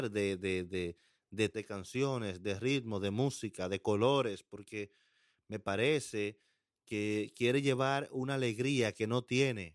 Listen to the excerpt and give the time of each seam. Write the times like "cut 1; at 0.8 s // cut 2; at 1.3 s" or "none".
cut 1; at 1.5 s